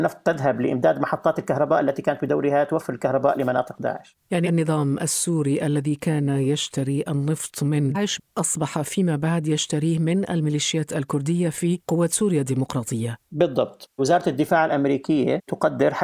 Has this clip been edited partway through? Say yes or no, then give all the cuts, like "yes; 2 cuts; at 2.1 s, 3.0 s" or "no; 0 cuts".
yes; 1 cut; at 7.9 s